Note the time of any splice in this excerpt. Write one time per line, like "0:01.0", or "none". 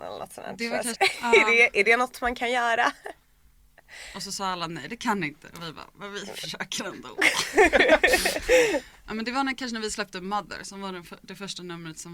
0:00.9

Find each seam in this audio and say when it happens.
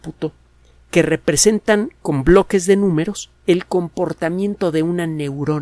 0:03.4

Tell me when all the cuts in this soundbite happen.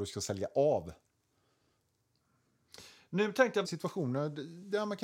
0:03.6

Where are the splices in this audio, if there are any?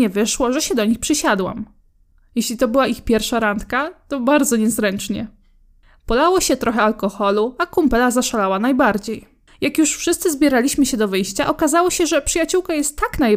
none

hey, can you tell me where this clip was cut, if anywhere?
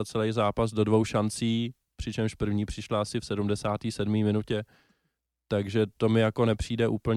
none

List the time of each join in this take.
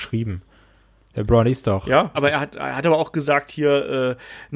0:02.1

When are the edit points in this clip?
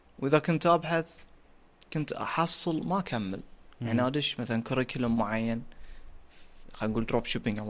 none

